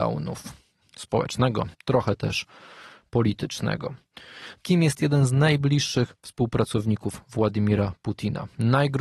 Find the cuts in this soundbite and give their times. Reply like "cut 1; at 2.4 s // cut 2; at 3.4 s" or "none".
cut 1; at 1.7 s // cut 2; at 4.6 s